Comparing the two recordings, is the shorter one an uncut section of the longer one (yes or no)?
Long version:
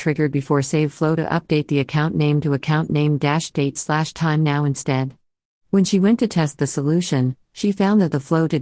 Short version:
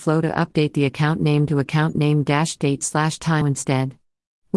no